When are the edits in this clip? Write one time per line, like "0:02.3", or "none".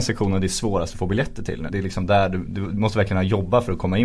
0:01.7